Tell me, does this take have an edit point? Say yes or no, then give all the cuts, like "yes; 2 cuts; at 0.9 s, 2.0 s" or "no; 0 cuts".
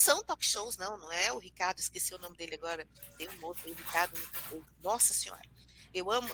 no; 0 cuts